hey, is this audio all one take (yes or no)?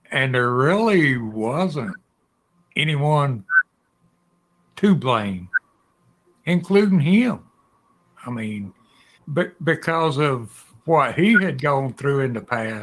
no